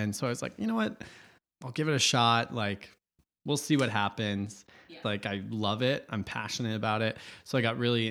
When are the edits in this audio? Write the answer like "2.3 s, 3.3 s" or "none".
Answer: 5.0 s